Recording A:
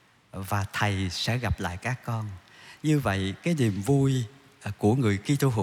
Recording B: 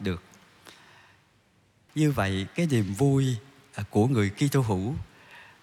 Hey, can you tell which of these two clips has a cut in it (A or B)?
B